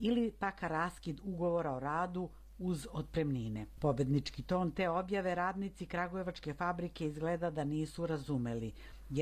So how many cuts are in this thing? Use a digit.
1